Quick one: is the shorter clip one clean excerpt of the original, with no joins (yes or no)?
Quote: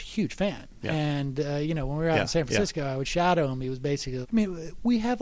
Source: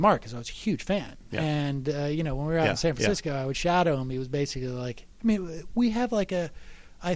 no